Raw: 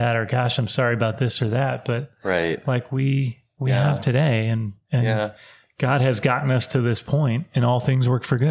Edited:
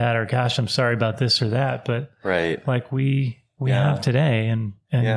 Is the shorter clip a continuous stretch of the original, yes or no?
yes